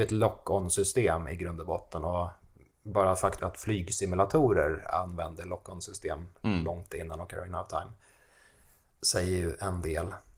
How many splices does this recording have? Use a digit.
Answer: 1